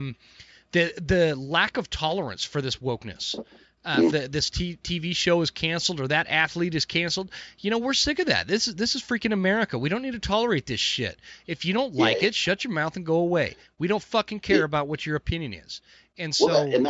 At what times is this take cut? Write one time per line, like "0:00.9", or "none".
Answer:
0:04.1